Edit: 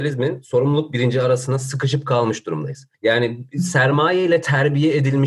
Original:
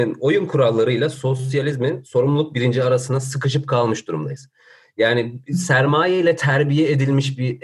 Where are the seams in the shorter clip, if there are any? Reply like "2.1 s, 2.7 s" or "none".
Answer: 2.9 s